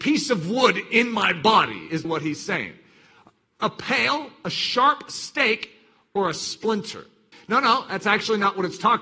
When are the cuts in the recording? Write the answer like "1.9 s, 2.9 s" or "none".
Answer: 2.0 s, 7.3 s